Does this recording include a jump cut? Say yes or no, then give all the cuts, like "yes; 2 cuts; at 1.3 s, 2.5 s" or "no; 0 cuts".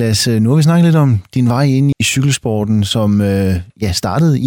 yes; 1 cut; at 1.9 s